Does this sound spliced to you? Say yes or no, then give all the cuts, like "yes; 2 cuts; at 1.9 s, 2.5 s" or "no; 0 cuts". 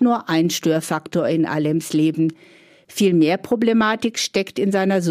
no; 0 cuts